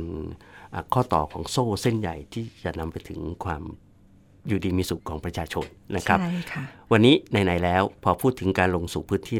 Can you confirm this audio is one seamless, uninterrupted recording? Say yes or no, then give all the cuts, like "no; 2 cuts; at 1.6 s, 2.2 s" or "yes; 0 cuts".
no; 2 cuts; at 5.0 s, 8.0 s